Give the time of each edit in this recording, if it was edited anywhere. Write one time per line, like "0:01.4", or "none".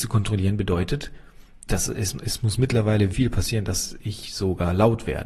0:01.7
0:03.1